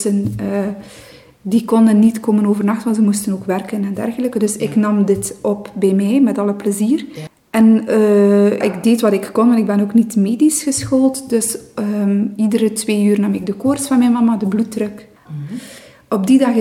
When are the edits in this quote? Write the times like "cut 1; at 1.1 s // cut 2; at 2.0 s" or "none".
cut 1; at 8.6 s // cut 2; at 15.3 s